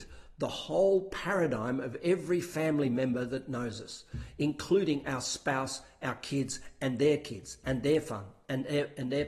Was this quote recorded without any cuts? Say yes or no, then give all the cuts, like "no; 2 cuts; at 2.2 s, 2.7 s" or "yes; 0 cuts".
yes; 0 cuts